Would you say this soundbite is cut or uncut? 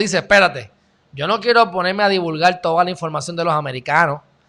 uncut